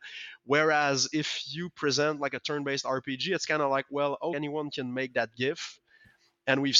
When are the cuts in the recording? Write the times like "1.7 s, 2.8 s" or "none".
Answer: 4.3 s